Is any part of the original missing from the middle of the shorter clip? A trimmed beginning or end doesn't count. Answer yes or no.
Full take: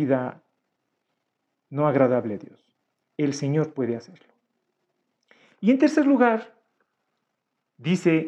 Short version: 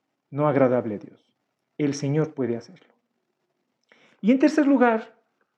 no